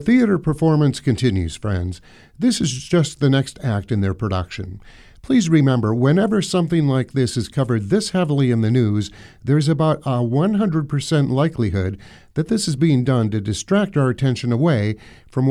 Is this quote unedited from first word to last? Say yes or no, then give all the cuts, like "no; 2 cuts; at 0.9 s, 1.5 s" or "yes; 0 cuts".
yes; 0 cuts